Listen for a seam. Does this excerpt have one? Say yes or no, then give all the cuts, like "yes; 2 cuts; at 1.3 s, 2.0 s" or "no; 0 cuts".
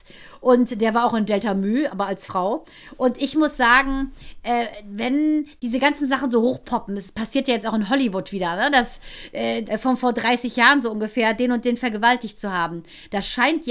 yes; 1 cut; at 9.7 s